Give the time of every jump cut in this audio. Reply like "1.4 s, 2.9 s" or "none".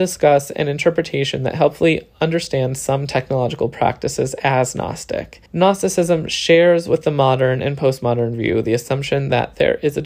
5.5 s